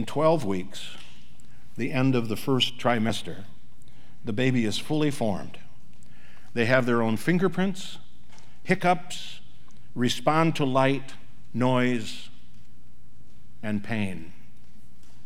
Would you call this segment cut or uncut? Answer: cut